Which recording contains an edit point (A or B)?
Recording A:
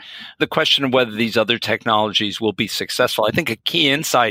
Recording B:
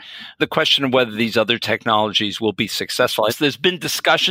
B